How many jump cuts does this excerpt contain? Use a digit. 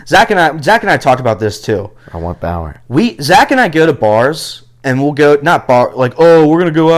0